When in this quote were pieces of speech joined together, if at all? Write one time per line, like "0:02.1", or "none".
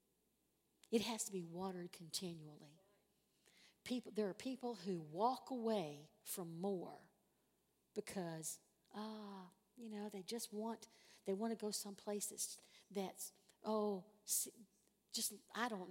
none